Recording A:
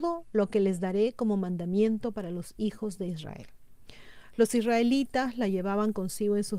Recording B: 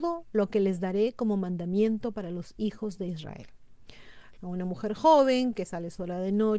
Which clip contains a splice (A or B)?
B